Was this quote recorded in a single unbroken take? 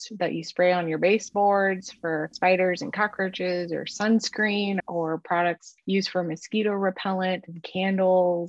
yes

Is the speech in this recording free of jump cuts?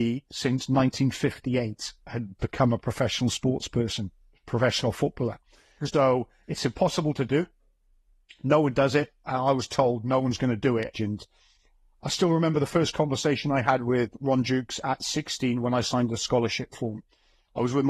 no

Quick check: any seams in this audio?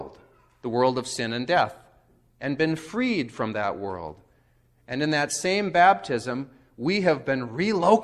no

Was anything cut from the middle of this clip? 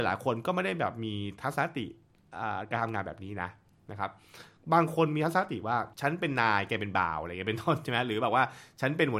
yes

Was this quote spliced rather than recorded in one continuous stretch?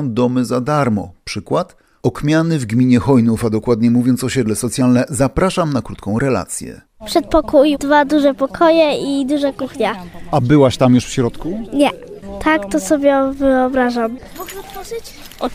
yes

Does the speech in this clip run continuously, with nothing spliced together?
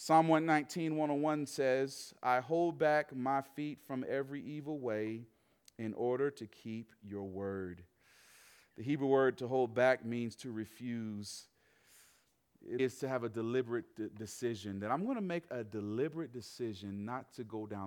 no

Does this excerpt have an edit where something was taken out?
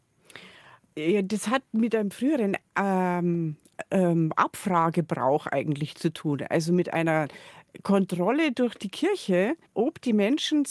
yes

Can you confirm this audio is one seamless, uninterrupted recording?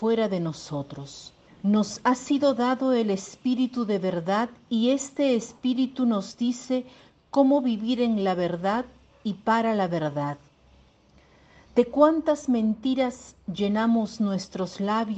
no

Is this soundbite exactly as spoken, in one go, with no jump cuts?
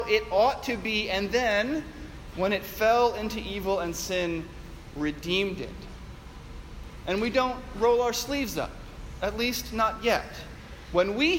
no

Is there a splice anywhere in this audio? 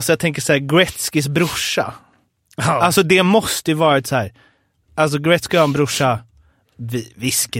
no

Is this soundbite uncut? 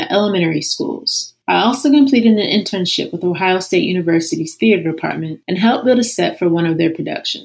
no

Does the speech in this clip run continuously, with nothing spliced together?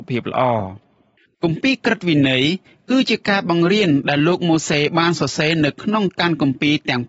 yes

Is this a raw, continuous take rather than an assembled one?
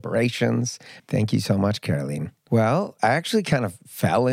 no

